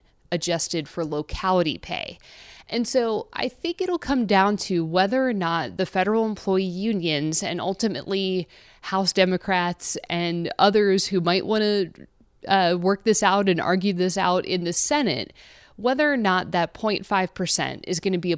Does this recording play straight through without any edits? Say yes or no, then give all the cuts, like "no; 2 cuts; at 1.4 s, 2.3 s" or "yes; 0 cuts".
yes; 0 cuts